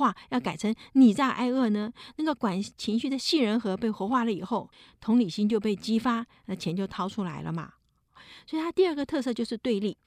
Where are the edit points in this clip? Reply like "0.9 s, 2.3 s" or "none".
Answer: none